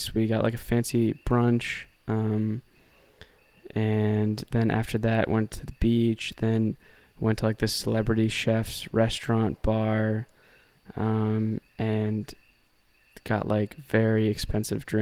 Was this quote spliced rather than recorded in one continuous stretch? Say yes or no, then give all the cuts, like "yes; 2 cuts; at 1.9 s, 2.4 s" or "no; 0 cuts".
no; 0 cuts